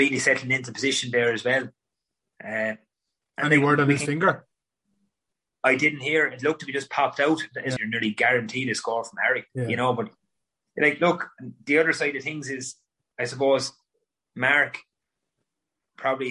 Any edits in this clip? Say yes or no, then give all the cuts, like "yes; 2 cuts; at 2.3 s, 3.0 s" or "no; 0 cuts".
yes; 2 cuts; at 7.8 s, 9.5 s